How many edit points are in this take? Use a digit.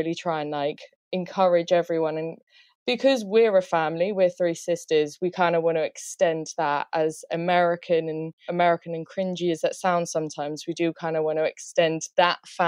1